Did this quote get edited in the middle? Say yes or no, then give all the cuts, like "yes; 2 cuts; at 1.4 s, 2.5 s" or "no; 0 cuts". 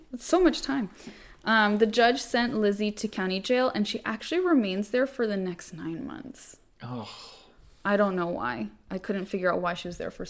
no; 0 cuts